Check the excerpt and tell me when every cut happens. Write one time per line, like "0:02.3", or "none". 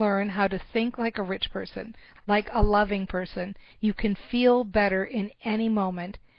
0:02.1
0:03.7